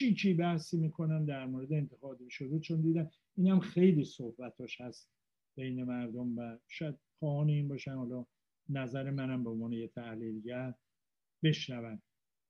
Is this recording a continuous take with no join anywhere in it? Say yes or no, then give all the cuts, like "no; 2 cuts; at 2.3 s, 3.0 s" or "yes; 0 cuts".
yes; 0 cuts